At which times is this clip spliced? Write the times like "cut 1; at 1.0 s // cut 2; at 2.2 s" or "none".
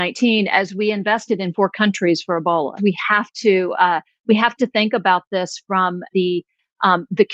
cut 1; at 2.8 s // cut 2; at 6.1 s